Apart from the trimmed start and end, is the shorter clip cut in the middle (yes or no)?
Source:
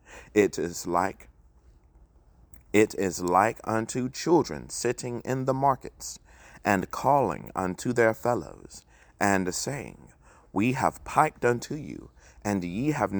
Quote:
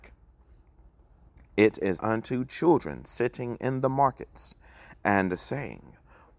yes